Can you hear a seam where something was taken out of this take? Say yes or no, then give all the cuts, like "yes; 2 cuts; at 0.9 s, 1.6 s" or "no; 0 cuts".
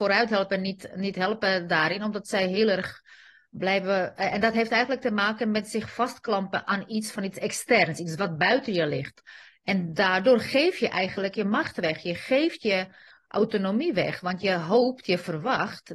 no; 0 cuts